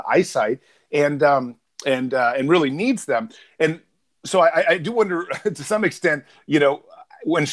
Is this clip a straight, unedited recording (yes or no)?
yes